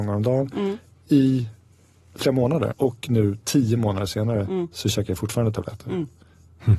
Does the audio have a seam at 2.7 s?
yes; 1 cut; at 2.7 s

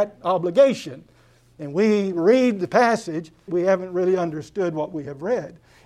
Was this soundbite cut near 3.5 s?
yes; 1 cut; at 3.5 s

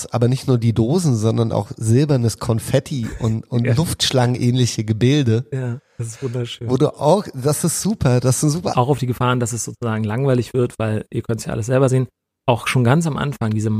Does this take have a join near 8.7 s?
yes; 1 cut; at 8.7 s

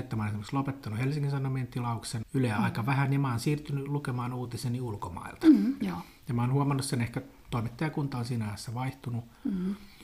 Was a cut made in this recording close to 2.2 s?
yes; 2 cuts; at 2.2 s, 5.8 s

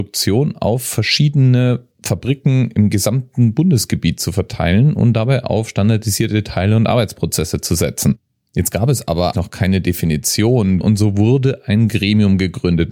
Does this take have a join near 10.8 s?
yes; 2 cuts; at 9.3 s, 10.8 s

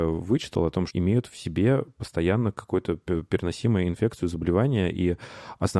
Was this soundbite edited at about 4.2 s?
no; 1 cut; at 0.9 s

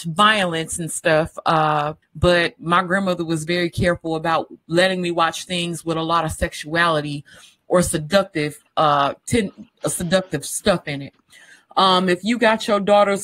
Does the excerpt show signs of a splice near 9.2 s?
no; 1 cut; at 2.0 s

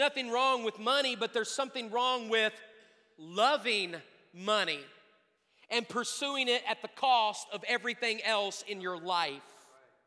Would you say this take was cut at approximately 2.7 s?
no; 0 cuts

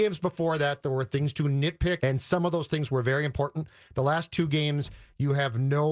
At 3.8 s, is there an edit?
no; 1 cut; at 2.0 s

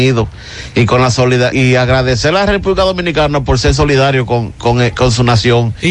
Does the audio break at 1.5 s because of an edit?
yes; 1 cut; at 1.5 s

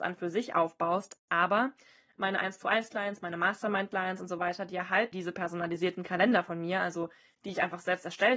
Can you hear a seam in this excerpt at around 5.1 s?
yes; 1 cut; at 5.1 s

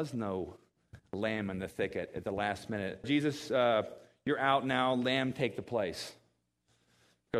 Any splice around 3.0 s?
yes; 1 cut; at 3.0 s

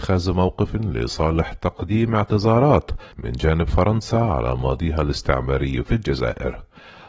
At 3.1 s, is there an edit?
yes; 1 cut; at 3.1 s

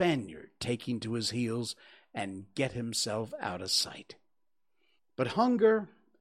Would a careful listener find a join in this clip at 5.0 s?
yes; 1 cut; at 5.0 s

